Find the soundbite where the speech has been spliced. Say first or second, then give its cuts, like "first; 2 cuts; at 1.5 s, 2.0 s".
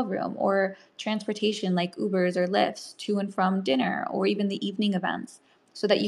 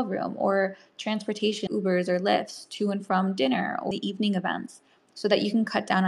second; 2 cuts; at 1.7 s, 3.9 s